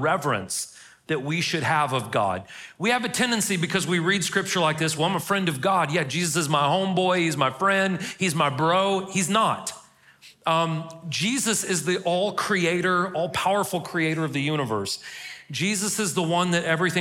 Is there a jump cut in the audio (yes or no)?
no